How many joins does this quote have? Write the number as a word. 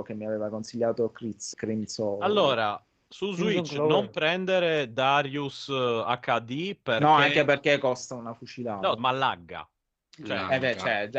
two